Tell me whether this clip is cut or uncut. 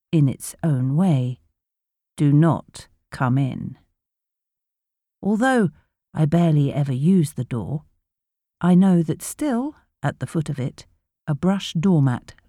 uncut